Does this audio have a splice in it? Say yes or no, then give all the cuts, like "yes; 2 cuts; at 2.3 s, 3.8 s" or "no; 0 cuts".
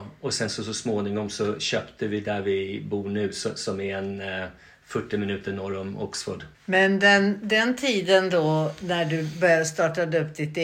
yes; 1 cut; at 6.6 s